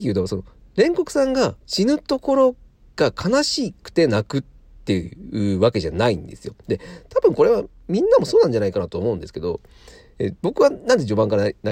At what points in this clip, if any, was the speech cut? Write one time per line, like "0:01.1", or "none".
0:01.6